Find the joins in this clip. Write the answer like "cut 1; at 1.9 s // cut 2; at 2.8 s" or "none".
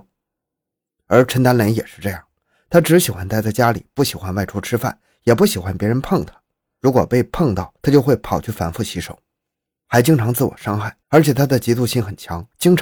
cut 1; at 9.8 s // cut 2; at 11.0 s